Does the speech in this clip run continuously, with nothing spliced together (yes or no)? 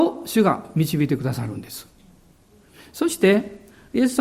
yes